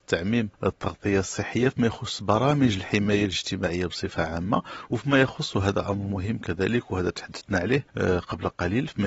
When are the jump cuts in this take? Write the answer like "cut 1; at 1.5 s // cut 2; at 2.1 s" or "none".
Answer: none